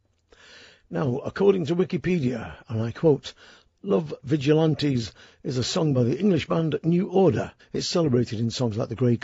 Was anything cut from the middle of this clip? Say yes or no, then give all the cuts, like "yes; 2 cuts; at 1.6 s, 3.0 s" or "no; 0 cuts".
yes; 1 cut; at 7.6 s